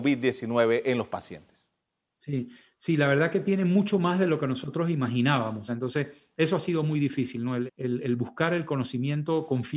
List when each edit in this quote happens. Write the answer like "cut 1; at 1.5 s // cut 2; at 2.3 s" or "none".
cut 1; at 5.7 s // cut 2; at 7.7 s